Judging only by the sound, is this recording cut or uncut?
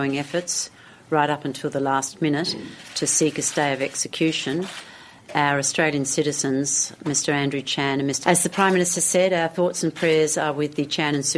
cut